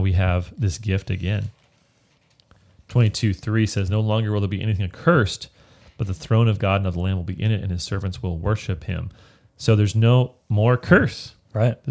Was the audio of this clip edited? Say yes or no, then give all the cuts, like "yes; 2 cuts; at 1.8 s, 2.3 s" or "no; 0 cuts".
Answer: no; 0 cuts